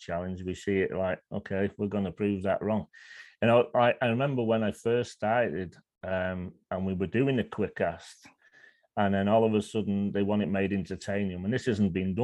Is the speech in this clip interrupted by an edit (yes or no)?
no